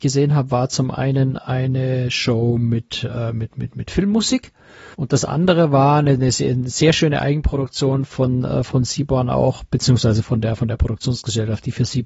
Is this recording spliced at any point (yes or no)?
no